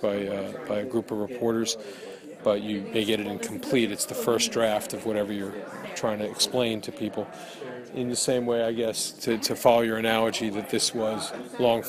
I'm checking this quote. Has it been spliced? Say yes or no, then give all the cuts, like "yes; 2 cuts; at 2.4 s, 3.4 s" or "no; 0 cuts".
yes; 2 cuts; at 2.4 s, 7.9 s